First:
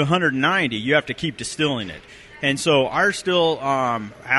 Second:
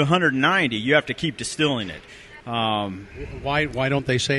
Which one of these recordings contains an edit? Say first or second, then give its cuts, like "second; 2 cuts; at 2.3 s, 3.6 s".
second; 1 cut; at 2.4 s